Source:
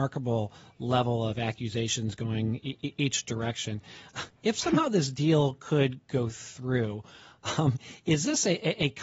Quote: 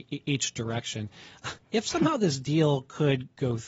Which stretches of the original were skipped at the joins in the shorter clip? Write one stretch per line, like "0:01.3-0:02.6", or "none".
none